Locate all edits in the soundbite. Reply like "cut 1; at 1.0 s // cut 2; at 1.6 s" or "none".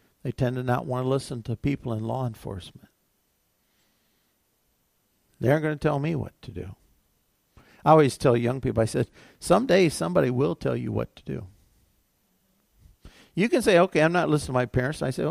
none